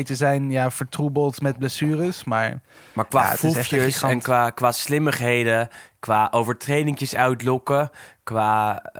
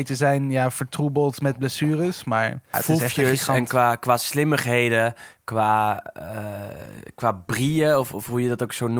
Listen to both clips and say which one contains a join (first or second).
second